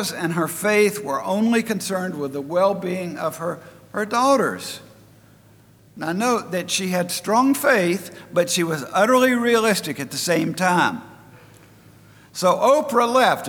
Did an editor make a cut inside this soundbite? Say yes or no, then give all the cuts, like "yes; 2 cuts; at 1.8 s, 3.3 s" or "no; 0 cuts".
no; 0 cuts